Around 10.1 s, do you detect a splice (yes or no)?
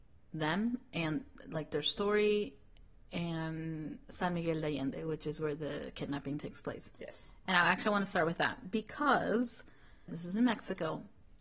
yes